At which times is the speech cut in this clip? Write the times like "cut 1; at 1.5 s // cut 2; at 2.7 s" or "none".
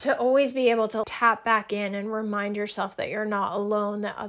cut 1; at 1.0 s